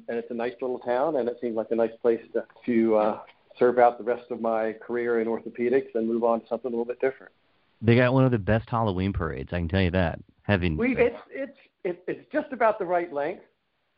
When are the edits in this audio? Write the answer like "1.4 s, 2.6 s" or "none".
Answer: 2.6 s, 10.9 s

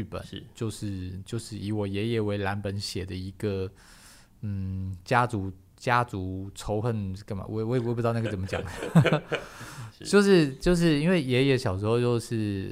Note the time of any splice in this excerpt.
none

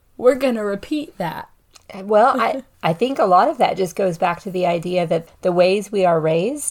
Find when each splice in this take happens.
5.3 s

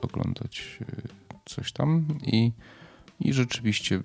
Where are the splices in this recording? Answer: none

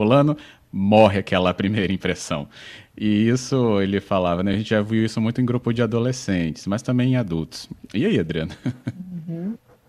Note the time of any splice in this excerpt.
none

